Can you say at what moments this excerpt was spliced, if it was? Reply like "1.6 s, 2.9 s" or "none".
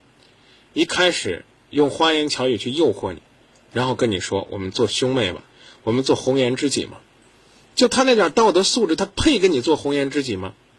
none